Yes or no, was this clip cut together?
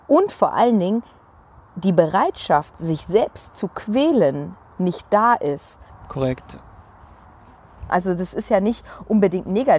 yes